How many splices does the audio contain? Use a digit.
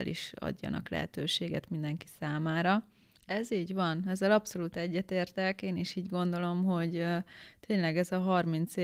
1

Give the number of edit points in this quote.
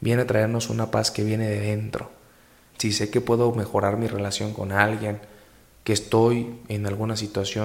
1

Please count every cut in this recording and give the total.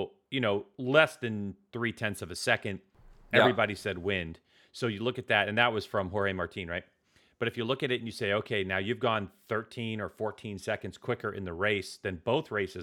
0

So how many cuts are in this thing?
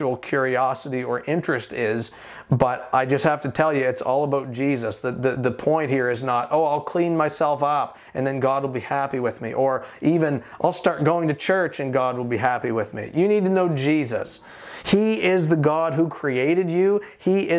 0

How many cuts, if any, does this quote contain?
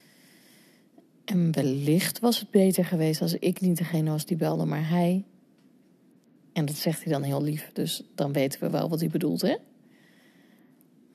0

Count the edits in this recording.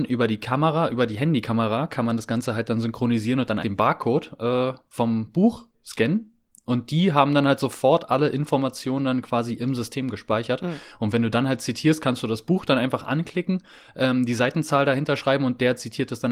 1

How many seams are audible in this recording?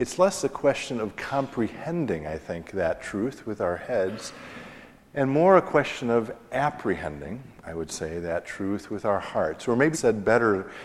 1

